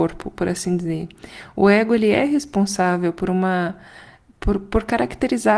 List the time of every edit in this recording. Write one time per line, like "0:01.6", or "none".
none